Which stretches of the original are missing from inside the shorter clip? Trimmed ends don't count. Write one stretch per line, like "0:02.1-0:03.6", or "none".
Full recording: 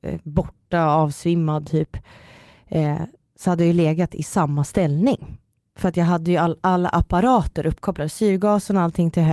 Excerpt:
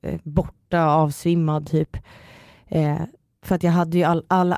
0:03.3-0:05.6